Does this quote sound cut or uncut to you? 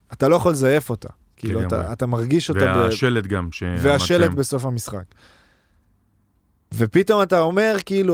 uncut